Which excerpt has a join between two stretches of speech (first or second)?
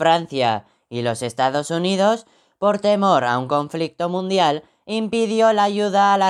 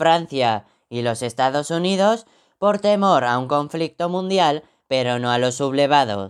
second